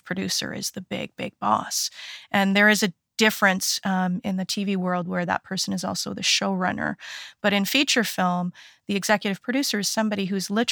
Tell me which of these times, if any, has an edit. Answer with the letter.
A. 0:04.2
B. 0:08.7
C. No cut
A